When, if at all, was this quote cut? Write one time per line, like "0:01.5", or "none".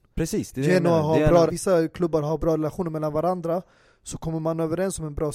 0:01.5